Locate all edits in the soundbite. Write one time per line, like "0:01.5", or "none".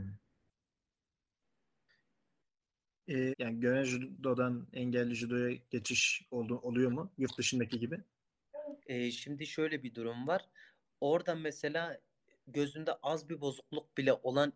0:03.3
0:08.8

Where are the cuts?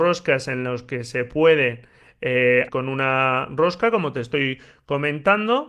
0:02.7

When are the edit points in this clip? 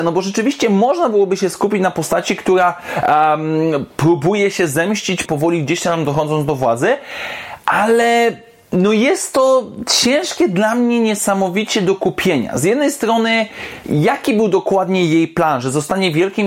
0:05.3

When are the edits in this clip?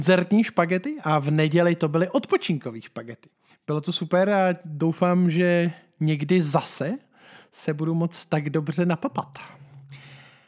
0:03.5

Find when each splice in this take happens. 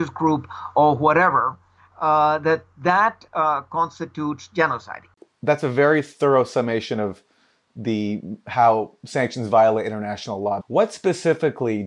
0:10.6

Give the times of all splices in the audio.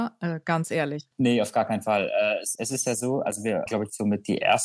0:01.1
0:02.6
0:03.7

